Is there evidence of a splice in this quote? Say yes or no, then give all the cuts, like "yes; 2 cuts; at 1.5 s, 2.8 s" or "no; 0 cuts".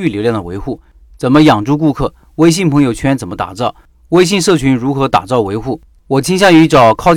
yes; 1 cut; at 6.0 s